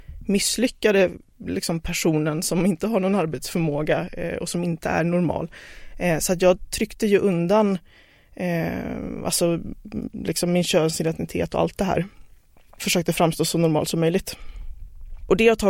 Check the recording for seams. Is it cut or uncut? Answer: uncut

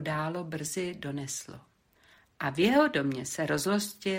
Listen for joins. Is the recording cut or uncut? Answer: uncut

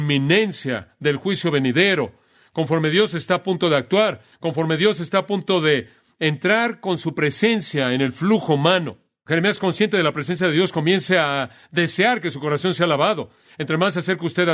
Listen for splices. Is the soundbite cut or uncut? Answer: uncut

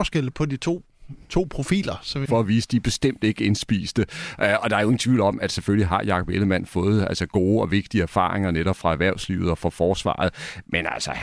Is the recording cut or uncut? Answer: cut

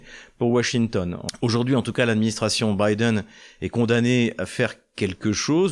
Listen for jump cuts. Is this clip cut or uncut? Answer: uncut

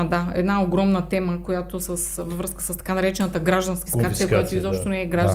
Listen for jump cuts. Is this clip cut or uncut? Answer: cut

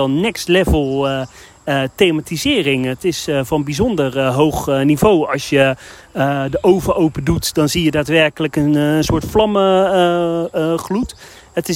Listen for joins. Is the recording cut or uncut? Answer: uncut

